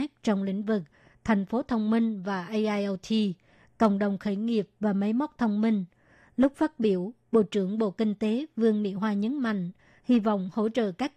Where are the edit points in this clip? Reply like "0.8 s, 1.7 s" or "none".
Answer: none

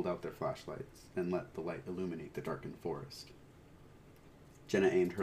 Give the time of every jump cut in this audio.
none

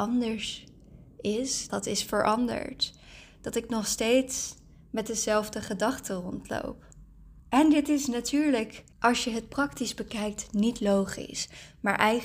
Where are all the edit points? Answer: 1.7 s, 8.9 s

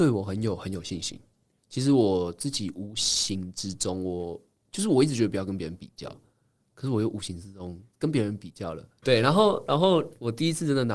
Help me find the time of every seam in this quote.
1.6 s, 9.0 s

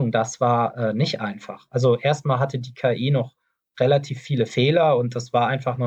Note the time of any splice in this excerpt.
none

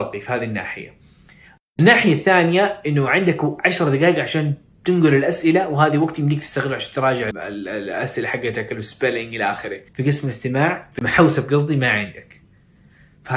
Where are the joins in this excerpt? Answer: 7.3 s, 9.9 s

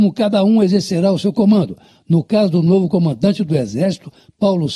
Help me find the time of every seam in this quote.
none

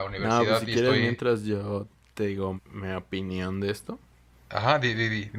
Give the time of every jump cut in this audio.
2.6 s

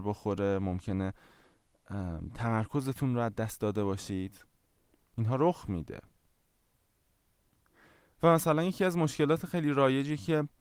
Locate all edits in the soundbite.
none

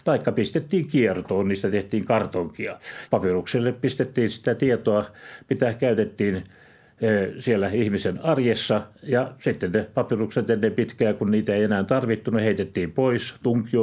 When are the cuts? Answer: 3.1 s

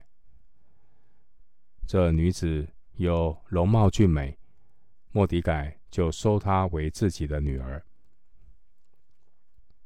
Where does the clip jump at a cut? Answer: 1.8 s, 5.1 s

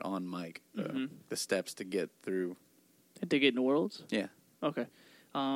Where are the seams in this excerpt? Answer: 1.3 s

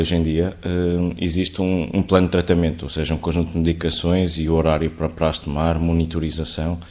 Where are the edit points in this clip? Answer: none

